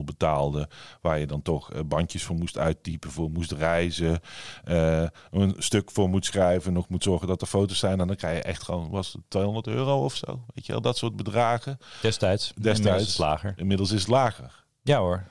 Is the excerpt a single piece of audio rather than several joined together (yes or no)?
yes